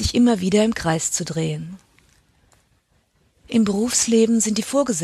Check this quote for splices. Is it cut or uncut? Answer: uncut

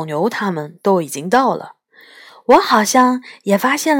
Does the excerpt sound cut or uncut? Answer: uncut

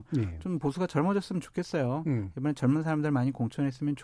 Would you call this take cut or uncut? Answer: uncut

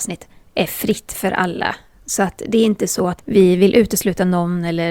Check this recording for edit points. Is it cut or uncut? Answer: cut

